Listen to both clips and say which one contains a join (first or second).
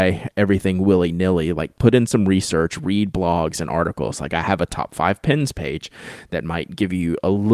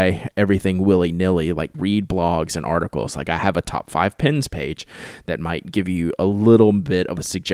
second